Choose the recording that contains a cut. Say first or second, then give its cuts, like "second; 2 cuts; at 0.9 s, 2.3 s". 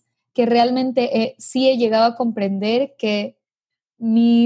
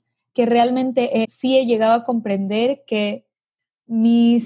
second; 1 cut; at 1.2 s